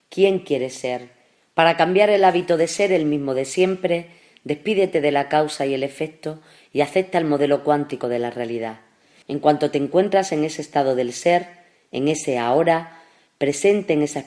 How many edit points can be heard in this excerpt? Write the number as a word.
two